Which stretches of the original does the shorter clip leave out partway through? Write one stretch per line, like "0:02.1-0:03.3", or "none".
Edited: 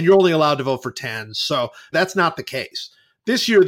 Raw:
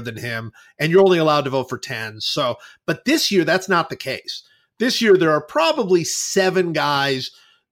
0:02.8-0:03.5